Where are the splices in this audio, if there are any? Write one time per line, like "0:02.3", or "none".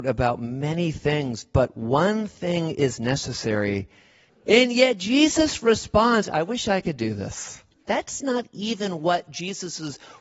0:04.3
0:07.9